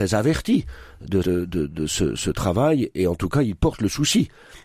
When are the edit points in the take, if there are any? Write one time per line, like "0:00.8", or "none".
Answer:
0:01.2